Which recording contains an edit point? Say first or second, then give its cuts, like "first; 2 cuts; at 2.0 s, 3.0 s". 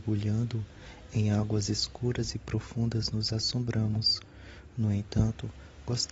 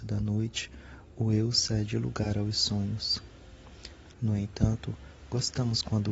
second; 1 cut; at 4.1 s